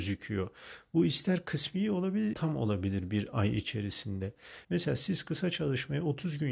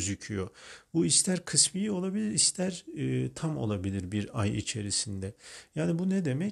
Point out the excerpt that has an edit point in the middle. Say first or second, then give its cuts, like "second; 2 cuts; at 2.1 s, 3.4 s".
first; 2 cuts; at 2.3 s, 4.6 s